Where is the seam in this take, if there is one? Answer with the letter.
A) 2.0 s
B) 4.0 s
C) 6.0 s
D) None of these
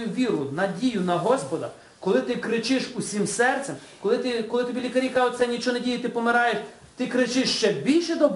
D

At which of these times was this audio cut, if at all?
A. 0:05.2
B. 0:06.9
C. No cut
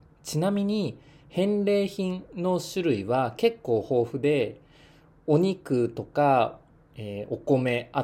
C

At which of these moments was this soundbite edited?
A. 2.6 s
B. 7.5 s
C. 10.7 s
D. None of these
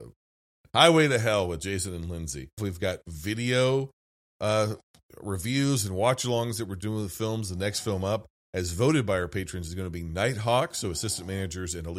A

